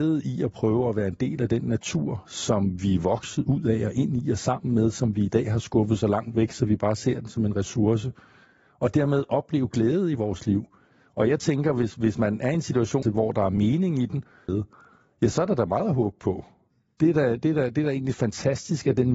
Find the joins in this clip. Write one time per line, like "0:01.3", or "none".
0:13.0
0:14.5